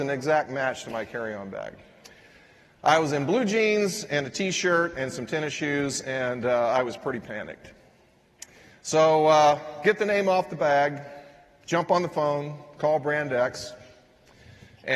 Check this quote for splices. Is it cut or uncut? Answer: uncut